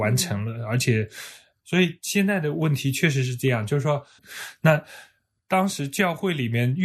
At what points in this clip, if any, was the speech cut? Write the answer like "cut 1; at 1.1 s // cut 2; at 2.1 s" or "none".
cut 1; at 1.6 s // cut 2; at 4.2 s